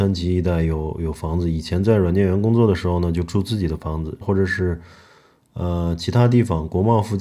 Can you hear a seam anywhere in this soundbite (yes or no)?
yes